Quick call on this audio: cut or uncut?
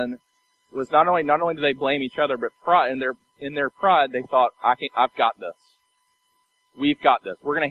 uncut